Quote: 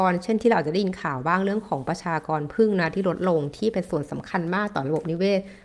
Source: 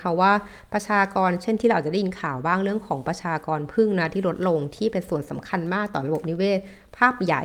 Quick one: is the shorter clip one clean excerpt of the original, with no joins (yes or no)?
yes